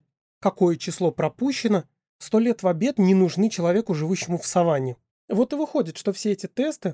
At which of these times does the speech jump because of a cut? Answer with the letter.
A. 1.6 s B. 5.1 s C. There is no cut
B